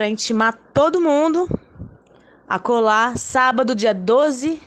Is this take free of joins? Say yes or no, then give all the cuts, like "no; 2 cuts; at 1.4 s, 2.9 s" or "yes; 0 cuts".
yes; 0 cuts